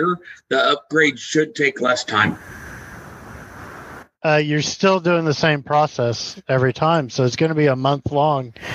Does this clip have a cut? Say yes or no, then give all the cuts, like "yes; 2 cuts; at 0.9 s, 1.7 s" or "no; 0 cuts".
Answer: no; 0 cuts